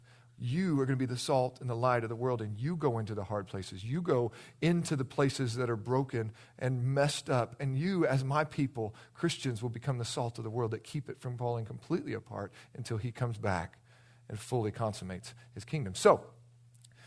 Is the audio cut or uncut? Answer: uncut